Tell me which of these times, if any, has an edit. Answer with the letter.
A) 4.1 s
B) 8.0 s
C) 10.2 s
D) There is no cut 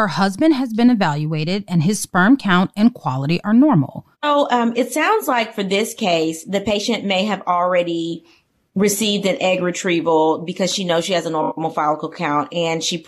A